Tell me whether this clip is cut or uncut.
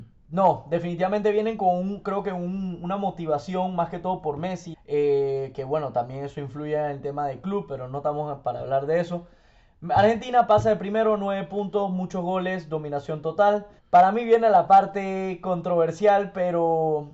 cut